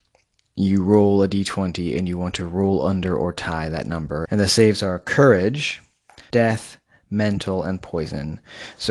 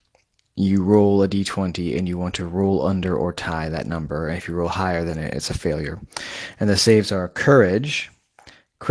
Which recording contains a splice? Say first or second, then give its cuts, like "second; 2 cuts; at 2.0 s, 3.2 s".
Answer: first; 2 cuts; at 4.3 s, 6.3 s